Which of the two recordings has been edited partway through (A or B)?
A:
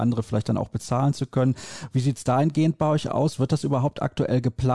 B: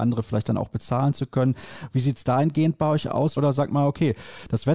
B